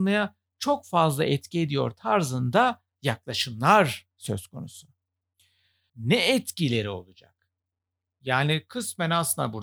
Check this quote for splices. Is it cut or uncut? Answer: cut